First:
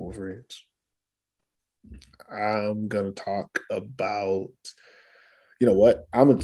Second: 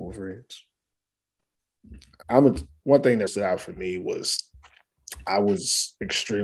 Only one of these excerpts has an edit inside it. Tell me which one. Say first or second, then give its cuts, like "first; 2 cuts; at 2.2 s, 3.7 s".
second; 2 cuts; at 2.2 s, 3.3 s